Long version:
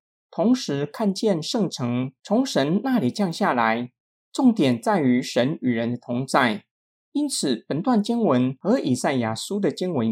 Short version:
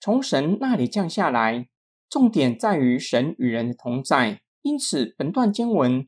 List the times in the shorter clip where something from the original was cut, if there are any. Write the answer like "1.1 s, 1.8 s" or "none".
4.5 s